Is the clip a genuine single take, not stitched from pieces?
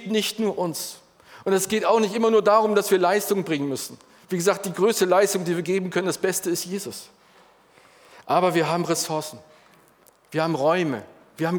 yes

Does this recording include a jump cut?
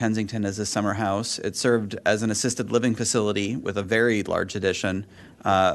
no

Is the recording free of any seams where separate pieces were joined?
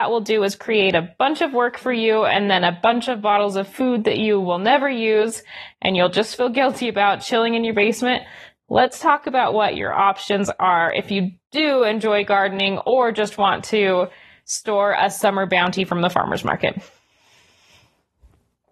yes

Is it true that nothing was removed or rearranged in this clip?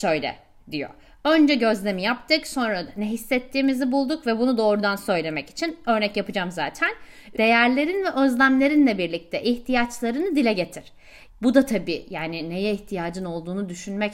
no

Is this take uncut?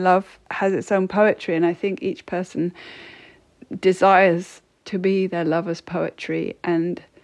yes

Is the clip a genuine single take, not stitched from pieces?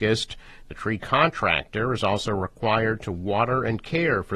yes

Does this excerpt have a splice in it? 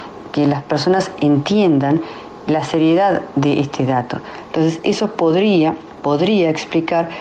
yes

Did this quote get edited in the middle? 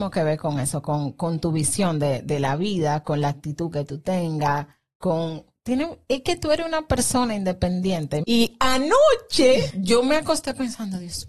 yes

